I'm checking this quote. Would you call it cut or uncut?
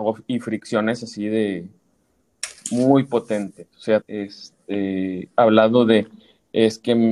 cut